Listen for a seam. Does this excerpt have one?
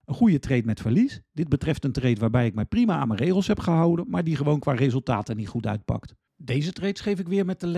no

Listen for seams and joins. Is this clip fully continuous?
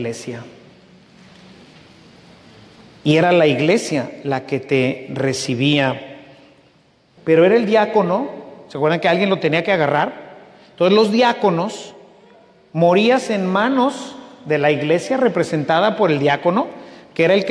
no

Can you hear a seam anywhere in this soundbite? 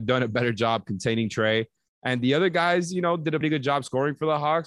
yes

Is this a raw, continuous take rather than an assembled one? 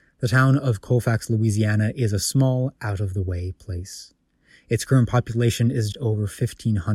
no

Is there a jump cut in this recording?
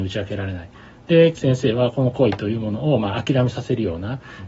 yes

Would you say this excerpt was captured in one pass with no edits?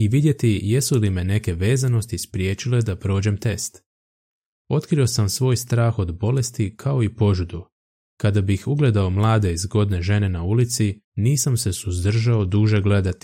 yes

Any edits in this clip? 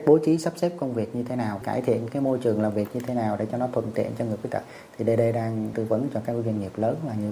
yes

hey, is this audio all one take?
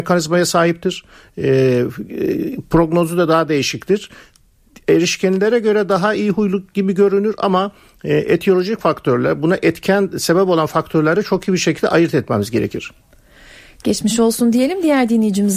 yes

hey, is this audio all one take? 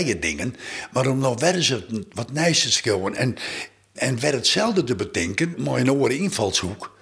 no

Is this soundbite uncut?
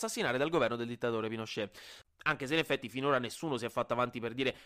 no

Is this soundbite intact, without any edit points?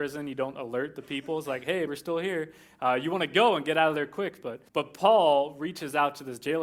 no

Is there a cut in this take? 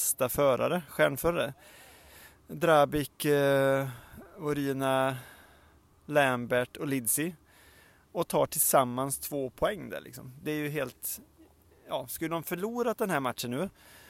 no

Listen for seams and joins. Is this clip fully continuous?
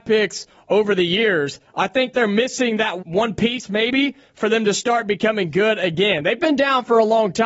no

